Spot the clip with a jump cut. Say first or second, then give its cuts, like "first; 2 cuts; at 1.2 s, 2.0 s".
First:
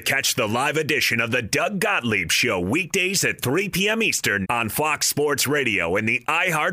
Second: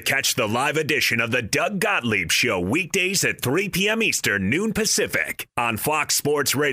first; 1 cut; at 4.4 s